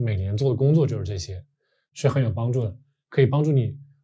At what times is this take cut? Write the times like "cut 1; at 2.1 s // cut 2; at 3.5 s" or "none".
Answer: cut 1; at 1.9 s